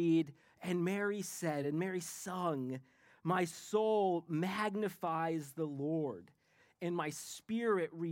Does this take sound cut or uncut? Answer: uncut